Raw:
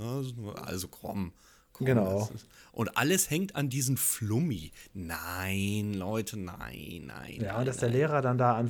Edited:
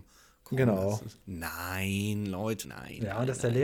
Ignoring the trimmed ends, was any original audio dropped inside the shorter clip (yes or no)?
yes